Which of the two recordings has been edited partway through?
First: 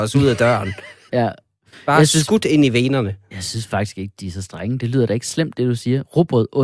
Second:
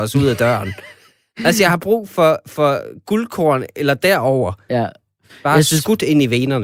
first; 1 cut; at 1.1 s

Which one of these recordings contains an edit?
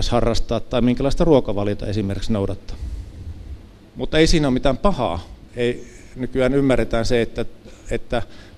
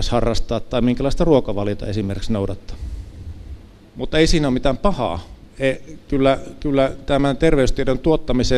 first; 1 cut; at 5.5 s

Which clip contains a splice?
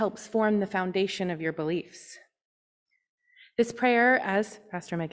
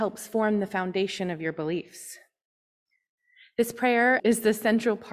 second; 1 cut; at 4.2 s

